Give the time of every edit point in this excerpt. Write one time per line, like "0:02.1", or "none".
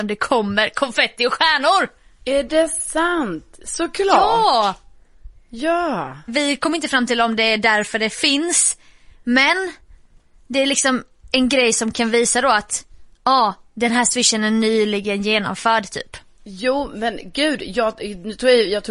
none